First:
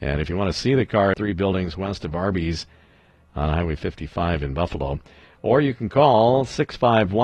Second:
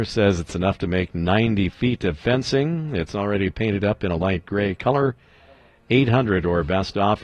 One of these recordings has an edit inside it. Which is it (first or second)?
first